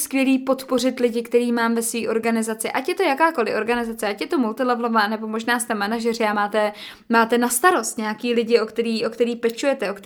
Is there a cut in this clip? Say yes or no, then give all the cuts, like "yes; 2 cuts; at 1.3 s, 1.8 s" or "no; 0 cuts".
no; 0 cuts